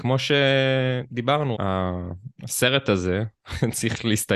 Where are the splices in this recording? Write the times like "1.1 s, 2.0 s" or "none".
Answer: 1.5 s